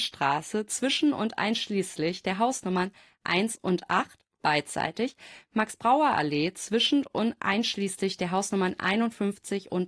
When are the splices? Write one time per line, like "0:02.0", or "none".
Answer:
none